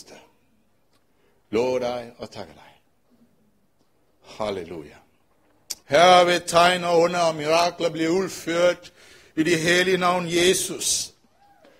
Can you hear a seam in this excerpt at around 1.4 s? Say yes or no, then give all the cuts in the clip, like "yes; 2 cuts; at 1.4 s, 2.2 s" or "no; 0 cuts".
no; 1 cut; at 5.8 s